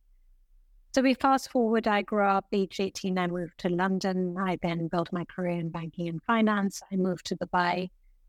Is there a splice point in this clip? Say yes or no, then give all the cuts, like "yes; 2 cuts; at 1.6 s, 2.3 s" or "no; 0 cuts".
no; 0 cuts